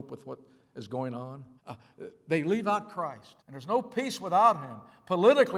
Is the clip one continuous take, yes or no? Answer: no